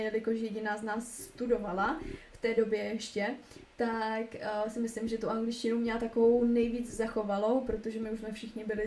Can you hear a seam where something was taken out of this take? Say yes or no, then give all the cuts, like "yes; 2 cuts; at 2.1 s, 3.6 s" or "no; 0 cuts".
no; 0 cuts